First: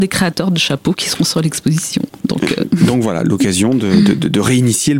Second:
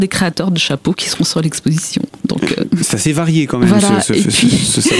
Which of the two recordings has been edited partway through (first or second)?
second